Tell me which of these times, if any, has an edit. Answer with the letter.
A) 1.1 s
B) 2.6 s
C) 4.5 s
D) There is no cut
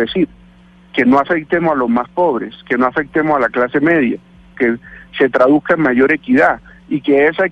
C